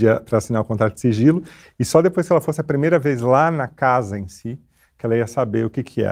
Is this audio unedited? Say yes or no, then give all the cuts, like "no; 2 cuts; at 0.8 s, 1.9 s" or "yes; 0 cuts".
yes; 0 cuts